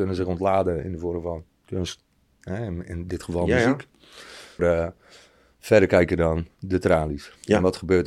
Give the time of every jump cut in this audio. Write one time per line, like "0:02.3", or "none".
0:04.6